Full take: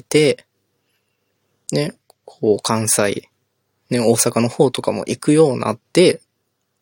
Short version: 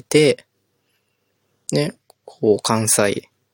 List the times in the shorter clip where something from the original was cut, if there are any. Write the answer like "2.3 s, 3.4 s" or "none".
none

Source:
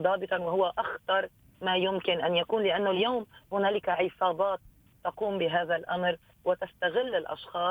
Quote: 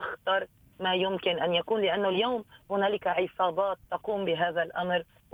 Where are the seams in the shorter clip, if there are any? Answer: 3.8 s

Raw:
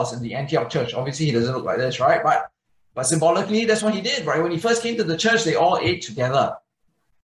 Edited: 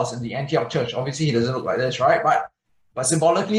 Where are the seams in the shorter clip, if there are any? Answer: none

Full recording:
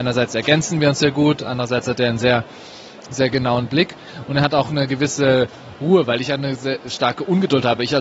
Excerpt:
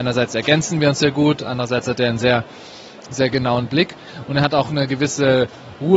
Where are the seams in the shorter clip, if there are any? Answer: none

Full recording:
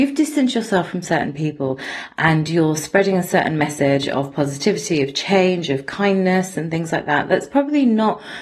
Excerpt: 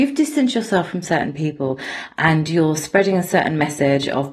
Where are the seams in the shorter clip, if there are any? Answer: none

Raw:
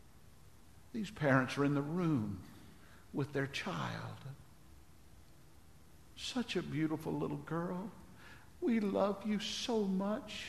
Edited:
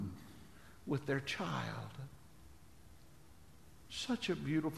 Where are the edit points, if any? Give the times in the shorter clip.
none

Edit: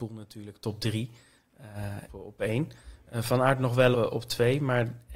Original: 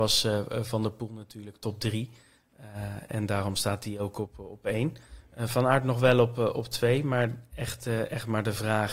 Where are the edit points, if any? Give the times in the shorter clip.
2.1 s, 3.9 s

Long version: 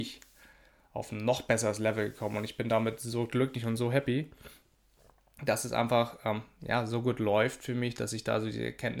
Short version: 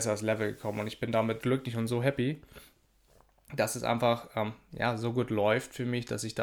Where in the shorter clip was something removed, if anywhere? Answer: 1.4 s

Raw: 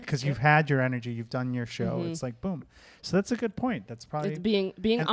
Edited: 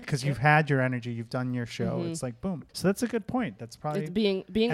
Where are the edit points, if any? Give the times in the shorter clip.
2.7 s

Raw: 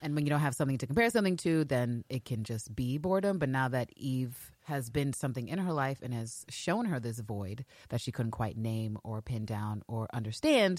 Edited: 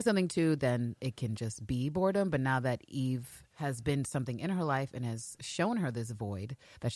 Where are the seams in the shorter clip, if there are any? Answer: none

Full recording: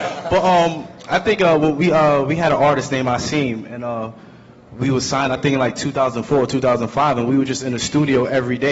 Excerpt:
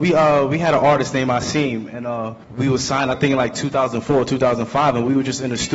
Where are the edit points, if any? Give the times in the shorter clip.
2.4 s

